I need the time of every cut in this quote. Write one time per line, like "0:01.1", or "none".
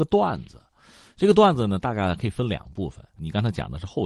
0:03.2